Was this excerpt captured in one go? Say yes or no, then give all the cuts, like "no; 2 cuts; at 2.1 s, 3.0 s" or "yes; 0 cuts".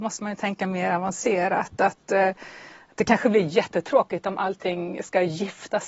yes; 0 cuts